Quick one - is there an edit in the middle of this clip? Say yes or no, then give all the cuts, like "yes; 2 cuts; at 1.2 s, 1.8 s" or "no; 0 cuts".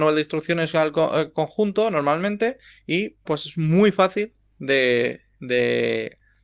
yes; 1 cut; at 3.3 s